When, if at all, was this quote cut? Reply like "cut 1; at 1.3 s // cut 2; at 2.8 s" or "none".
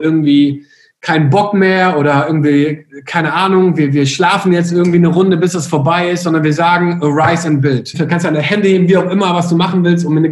cut 1; at 7.9 s

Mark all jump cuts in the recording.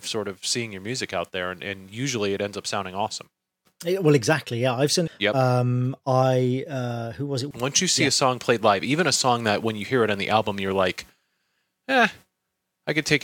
cut 1; at 5.1 s // cut 2; at 7.5 s

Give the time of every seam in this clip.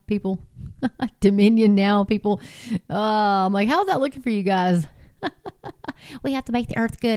none

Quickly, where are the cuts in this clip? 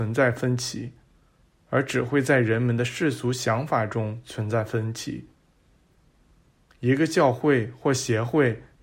none

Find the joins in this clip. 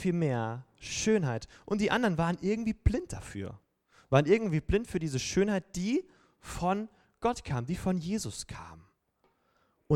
none

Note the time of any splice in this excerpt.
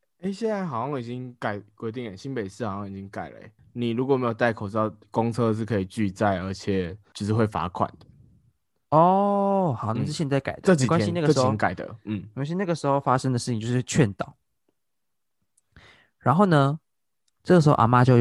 none

